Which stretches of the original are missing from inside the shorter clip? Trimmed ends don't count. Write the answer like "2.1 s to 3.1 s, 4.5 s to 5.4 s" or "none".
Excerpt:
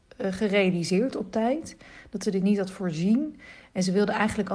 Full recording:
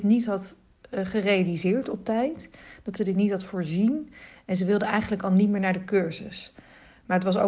none